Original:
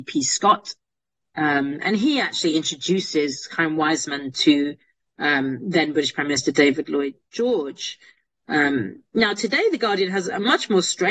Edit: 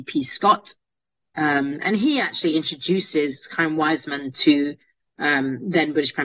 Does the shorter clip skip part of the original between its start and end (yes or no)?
no